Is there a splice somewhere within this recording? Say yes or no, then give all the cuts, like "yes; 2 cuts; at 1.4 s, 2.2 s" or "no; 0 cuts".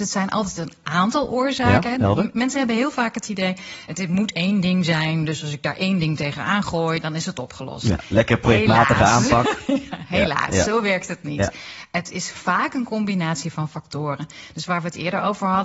no; 0 cuts